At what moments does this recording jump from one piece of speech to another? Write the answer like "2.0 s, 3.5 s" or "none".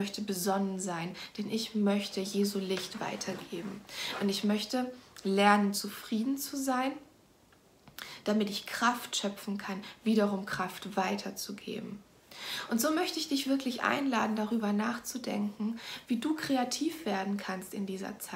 none